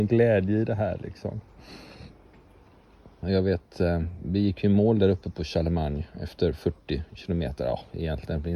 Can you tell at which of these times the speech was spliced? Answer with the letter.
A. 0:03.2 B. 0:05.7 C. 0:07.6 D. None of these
A